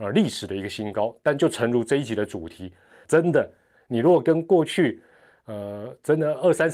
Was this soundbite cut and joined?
yes; 1 cut; at 3.0 s

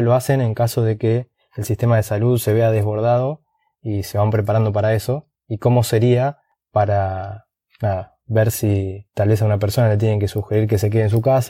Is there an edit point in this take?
no; 0 cuts

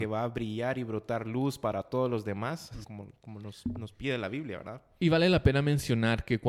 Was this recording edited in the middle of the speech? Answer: yes; 1 cut; at 2.8 s

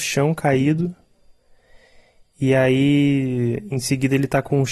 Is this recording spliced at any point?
no; 0 cuts

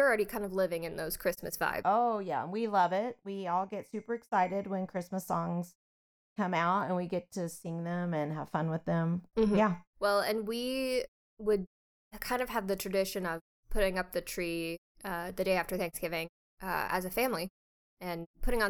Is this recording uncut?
yes; 0 cuts

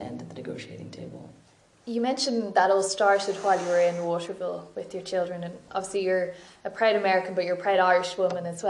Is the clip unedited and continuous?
yes; 0 cuts

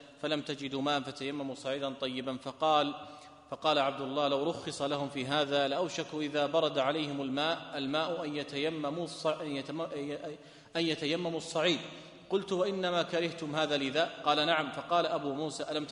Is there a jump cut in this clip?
no; 0 cuts

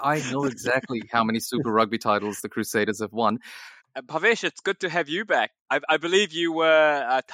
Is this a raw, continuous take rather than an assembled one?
no; 2 cuts; at 3.8 s, 5.6 s

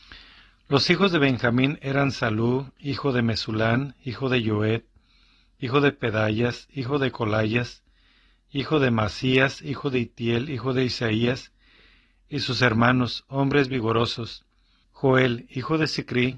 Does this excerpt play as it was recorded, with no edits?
no; 1 cut; at 14.8 s

